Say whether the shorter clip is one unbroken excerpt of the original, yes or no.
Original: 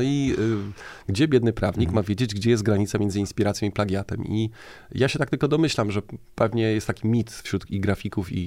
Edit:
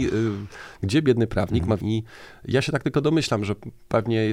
no